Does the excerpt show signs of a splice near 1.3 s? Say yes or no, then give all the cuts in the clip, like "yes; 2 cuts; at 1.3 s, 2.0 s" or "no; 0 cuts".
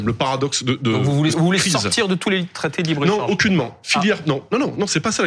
yes; 1 cut; at 1.3 s